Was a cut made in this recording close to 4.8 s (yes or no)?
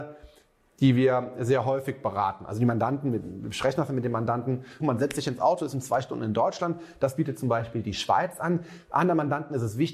yes